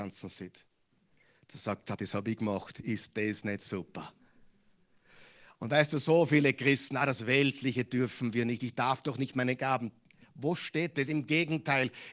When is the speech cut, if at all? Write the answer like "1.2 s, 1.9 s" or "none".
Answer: 2.0 s